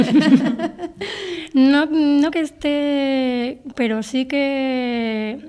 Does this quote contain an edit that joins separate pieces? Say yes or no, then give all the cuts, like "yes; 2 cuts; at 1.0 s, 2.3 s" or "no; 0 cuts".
yes; 2 cuts; at 2.3 s, 3.7 s